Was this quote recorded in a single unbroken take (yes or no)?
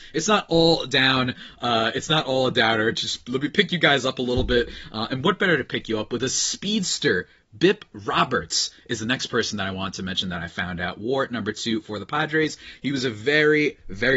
yes